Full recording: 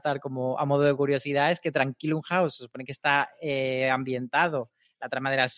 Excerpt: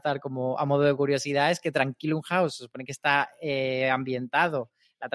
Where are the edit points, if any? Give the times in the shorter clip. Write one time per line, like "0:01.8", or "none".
none